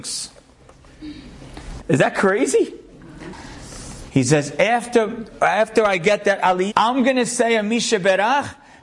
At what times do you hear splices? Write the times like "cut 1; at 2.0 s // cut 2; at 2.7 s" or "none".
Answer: cut 1; at 1.8 s // cut 2; at 4.1 s // cut 3; at 6.7 s